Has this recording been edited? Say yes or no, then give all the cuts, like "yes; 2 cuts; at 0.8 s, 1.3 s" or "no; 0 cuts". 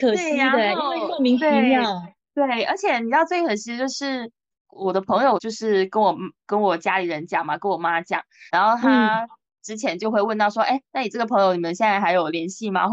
yes; 2 cuts; at 5.4 s, 8.5 s